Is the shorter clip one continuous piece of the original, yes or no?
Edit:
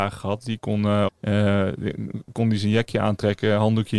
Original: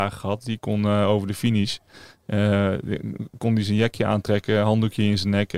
no